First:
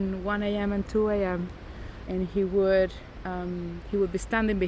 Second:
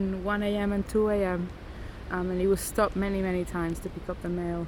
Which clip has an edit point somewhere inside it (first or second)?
first